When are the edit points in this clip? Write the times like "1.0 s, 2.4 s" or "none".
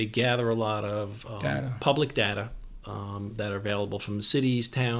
none